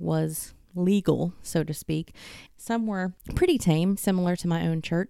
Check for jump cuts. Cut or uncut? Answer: cut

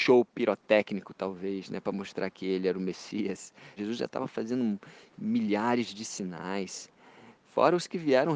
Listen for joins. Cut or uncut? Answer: cut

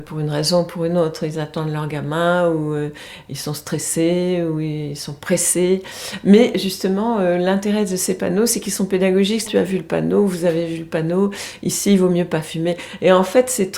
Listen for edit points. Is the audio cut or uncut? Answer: cut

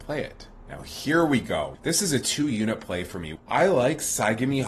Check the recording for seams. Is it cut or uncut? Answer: cut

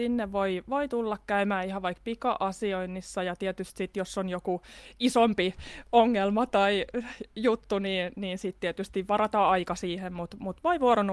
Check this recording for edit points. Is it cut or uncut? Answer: uncut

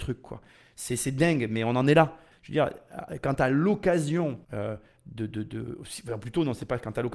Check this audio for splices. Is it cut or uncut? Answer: cut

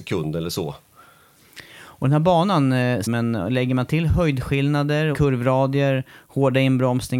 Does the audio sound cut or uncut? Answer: cut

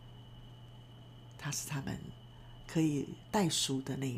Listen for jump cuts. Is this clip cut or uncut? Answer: uncut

